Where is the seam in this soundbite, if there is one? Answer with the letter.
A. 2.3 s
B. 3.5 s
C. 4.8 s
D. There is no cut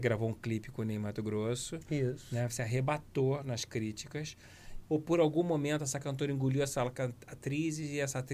C